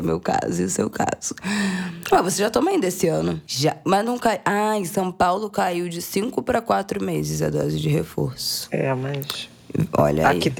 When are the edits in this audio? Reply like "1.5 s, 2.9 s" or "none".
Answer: 3.5 s